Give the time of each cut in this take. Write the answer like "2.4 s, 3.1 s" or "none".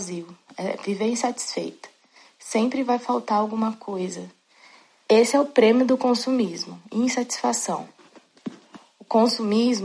none